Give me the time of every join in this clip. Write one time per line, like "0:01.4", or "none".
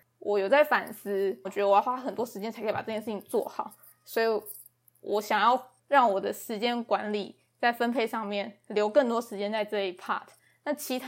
0:01.4
0:05.8